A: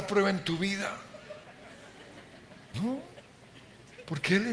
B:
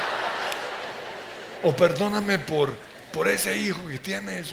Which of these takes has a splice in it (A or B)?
A